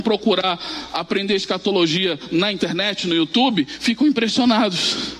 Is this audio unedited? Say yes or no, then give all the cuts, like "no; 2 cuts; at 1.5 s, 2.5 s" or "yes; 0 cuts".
yes; 0 cuts